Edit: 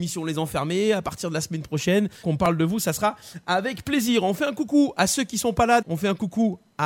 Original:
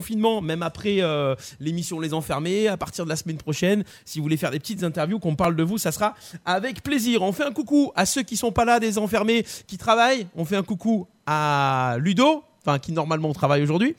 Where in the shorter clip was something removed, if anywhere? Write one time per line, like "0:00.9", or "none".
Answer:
0:02.2
0:05.8